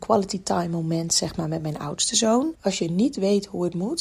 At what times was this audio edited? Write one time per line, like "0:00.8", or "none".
0:02.5